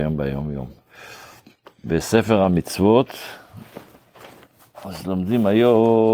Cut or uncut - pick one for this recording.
uncut